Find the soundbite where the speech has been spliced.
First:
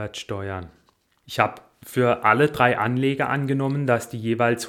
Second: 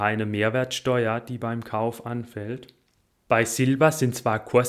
first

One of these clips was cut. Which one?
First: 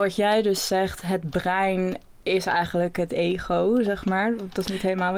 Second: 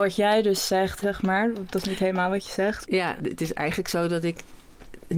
second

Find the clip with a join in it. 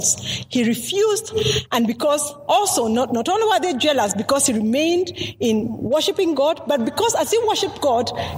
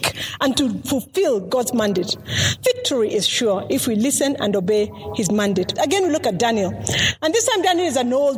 second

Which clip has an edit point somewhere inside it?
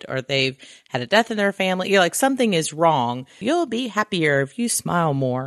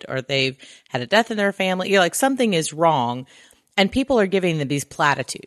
first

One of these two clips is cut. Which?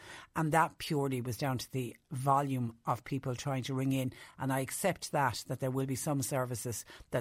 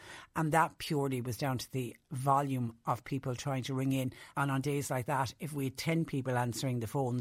second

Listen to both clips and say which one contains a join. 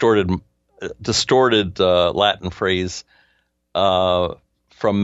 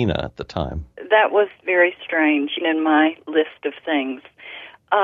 second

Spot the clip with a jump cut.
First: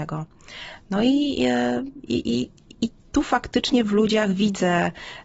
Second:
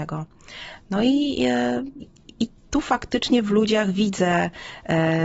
second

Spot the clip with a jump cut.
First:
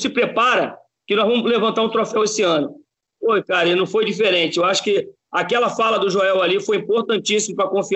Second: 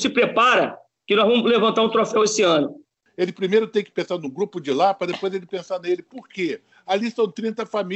second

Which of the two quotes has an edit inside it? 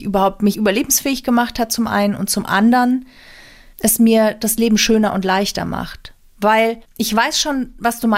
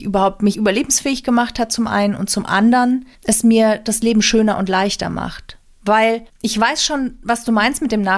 second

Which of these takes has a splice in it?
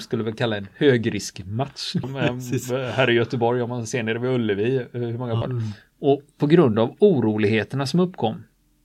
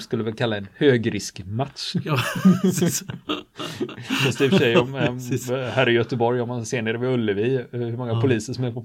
first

